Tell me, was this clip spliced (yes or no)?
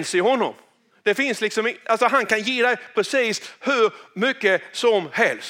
no